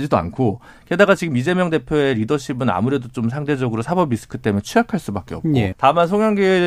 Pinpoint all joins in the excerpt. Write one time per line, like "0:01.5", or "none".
0:05.7